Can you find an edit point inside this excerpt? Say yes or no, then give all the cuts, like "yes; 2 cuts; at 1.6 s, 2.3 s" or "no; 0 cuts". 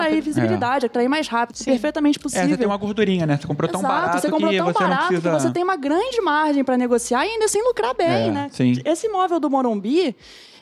yes; 1 cut; at 1.5 s